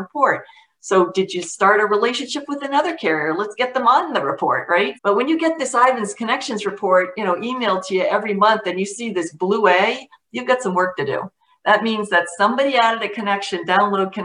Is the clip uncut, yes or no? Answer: no